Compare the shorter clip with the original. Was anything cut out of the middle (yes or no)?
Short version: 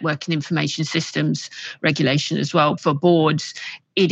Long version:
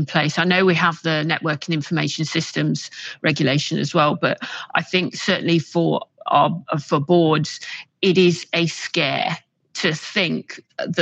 yes